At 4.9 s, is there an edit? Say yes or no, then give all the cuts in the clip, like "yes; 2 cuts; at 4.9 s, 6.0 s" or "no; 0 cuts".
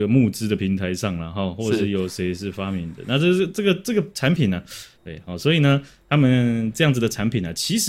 yes; 1 cut; at 4.9 s